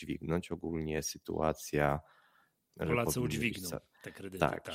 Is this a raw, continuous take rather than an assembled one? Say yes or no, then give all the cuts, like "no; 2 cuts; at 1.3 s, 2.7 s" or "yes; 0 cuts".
no; 1 cut; at 2.7 s